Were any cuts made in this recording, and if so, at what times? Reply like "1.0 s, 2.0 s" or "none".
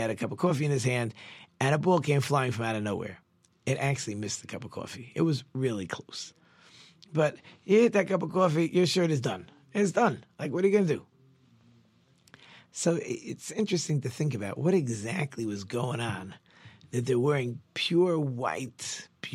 none